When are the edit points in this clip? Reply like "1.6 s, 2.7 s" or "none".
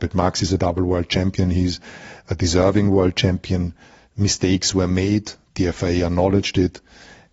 none